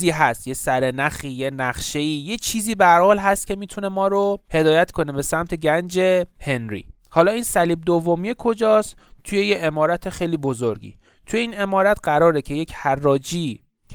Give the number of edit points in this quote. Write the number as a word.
one